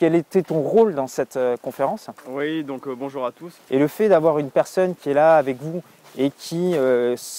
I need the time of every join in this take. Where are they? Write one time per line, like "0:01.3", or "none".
0:03.6